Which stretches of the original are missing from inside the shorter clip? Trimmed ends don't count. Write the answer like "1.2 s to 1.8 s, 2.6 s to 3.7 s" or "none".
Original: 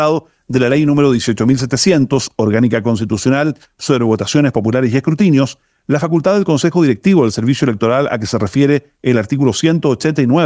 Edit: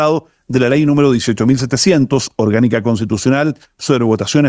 none